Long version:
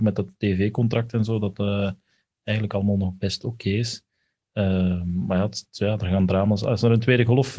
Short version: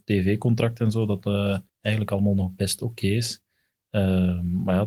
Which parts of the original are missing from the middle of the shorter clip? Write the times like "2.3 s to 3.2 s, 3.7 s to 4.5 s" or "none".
2.0 s to 2.3 s